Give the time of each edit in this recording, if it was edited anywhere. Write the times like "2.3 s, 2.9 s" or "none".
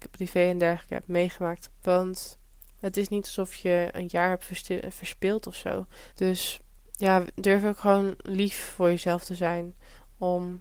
1.7 s, 6.1 s